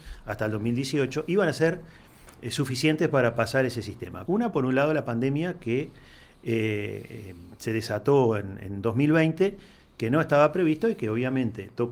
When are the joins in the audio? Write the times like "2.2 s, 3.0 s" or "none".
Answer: 4.3 s